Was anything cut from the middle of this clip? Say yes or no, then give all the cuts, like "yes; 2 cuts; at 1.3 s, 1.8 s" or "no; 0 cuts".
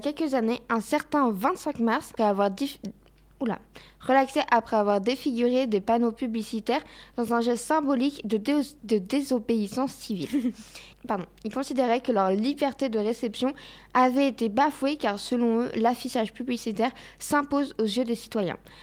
yes; 2 cuts; at 2.2 s, 10.9 s